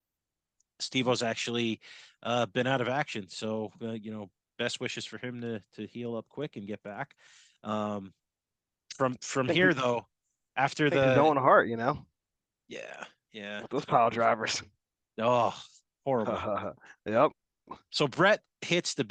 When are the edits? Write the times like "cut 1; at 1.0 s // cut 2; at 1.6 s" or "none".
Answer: none